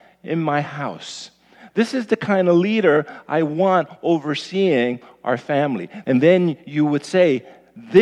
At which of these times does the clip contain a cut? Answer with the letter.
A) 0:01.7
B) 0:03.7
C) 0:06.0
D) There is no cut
C